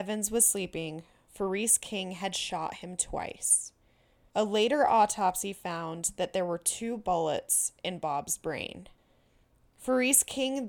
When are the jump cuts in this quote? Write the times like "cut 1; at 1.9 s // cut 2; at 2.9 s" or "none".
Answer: none